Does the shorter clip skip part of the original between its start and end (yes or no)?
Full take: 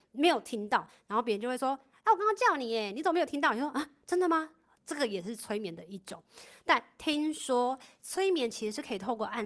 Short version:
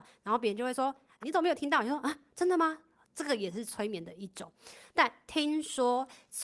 yes